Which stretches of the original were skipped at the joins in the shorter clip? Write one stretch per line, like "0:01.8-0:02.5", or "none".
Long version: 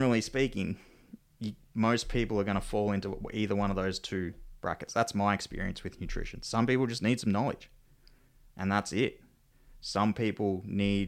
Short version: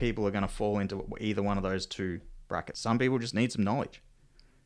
0:04.9-0:06.4